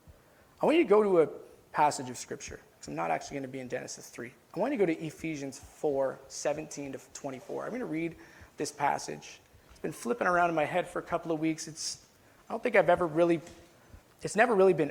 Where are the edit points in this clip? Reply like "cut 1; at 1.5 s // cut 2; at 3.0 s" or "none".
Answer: none